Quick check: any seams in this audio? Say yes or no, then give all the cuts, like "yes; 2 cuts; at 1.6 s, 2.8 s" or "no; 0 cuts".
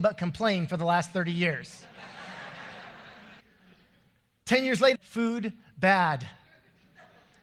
yes; 2 cuts; at 3.4 s, 4.9 s